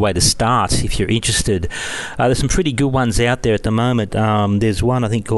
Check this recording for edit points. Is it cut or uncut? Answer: uncut